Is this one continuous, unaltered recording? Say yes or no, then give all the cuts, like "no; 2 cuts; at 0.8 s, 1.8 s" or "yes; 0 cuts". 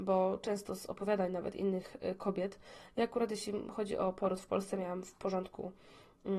yes; 0 cuts